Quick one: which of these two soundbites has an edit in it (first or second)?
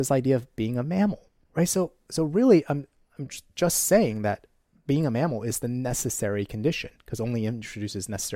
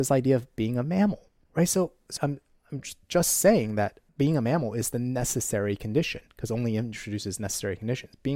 second